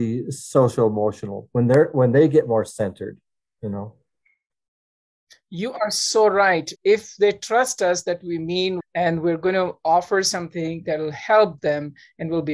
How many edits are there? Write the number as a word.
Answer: two